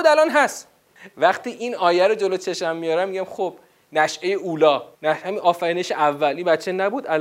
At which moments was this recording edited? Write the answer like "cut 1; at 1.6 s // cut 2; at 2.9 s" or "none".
cut 1; at 4.9 s